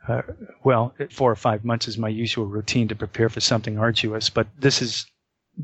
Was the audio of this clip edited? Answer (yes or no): yes